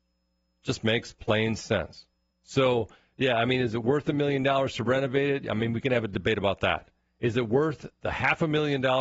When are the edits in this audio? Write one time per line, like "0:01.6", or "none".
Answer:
0:02.3